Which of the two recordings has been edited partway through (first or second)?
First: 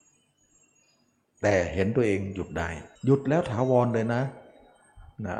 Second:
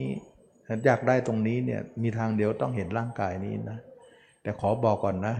first